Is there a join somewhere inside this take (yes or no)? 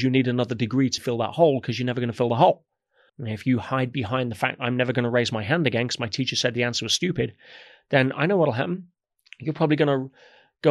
yes